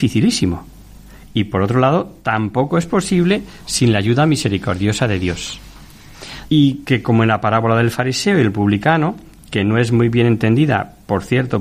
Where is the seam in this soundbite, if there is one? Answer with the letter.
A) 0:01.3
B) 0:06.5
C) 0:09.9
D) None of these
B